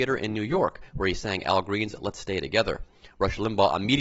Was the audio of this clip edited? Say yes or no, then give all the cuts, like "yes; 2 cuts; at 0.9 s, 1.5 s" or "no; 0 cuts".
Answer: no; 0 cuts